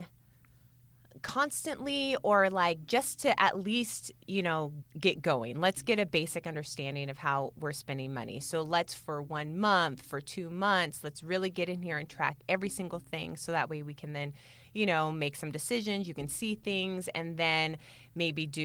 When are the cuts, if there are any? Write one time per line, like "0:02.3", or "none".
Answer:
0:04.8